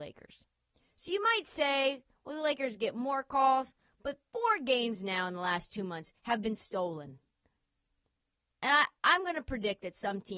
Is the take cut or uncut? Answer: uncut